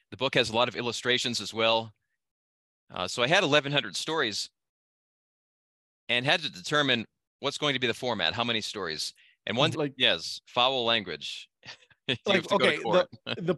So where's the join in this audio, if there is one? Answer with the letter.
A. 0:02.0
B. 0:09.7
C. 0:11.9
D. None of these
B